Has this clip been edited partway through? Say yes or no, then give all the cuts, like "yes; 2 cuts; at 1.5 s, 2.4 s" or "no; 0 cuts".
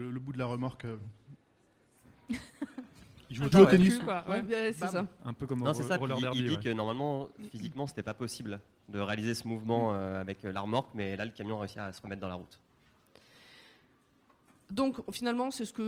yes; 1 cut; at 3.5 s